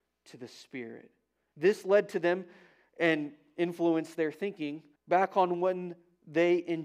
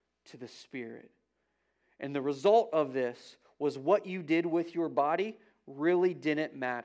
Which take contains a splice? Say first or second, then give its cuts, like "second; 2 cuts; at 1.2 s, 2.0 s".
first; 2 cuts; at 1.5 s, 5.0 s